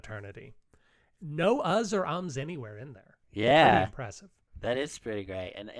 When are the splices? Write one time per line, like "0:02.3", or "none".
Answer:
none